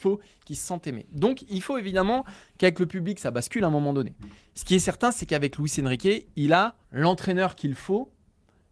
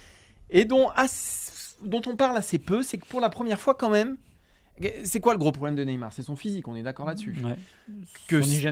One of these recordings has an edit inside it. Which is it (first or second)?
first